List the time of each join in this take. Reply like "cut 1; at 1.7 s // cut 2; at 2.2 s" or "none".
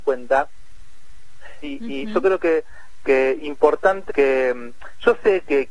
cut 1; at 1.6 s // cut 2; at 4.1 s